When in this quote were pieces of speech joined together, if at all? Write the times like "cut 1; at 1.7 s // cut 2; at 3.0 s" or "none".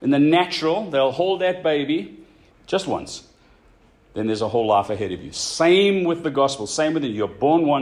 cut 1; at 2.5 s